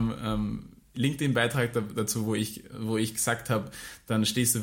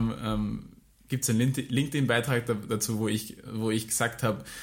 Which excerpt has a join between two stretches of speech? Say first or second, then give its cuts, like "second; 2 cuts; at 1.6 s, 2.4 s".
first; 1 cut; at 0.9 s